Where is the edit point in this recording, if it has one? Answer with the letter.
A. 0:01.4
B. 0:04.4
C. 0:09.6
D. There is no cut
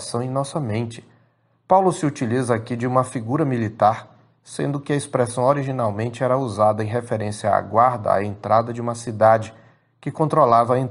D